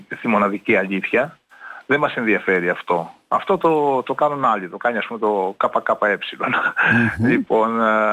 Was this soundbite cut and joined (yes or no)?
no